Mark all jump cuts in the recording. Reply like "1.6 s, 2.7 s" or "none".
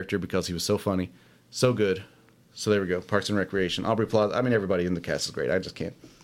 none